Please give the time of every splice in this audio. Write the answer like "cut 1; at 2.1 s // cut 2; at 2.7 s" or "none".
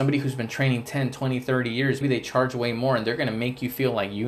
cut 1; at 2.0 s